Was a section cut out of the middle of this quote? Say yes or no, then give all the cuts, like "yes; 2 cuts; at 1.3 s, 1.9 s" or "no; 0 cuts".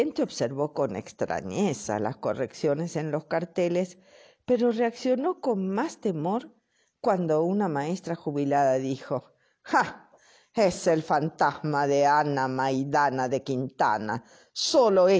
no; 0 cuts